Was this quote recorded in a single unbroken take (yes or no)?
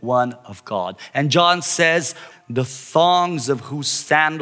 no